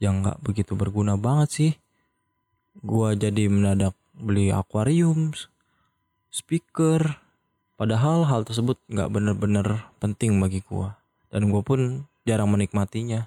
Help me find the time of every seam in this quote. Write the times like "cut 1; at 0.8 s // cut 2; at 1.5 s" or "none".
cut 1; at 7.6 s